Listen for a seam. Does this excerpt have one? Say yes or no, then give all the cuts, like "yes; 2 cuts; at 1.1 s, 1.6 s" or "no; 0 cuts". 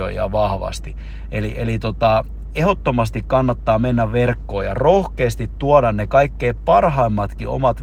no; 0 cuts